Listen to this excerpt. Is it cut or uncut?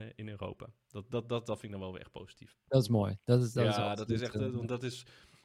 uncut